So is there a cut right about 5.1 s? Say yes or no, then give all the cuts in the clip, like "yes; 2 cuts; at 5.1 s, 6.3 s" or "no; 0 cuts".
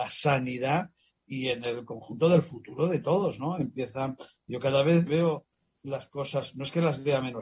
yes; 1 cut; at 5.1 s